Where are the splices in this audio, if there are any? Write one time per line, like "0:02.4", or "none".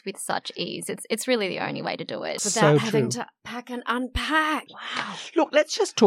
0:02.4
0:04.7